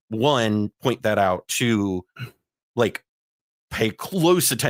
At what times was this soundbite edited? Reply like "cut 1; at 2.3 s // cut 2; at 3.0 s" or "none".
none